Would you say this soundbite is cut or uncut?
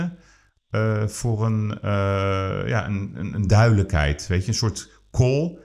uncut